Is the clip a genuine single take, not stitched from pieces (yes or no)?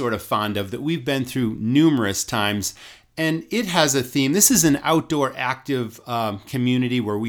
yes